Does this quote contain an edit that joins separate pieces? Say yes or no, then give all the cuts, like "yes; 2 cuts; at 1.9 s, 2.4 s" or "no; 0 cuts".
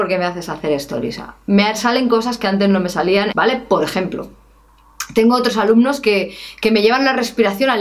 yes; 1 cut; at 3.3 s